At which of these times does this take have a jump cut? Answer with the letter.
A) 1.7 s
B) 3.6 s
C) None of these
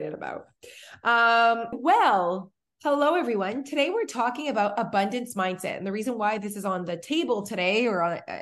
A